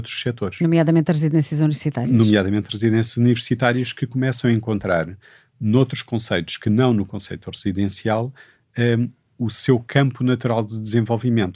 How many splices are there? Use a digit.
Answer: 0